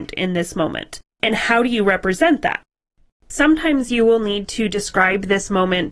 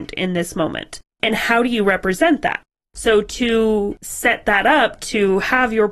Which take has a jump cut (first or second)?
second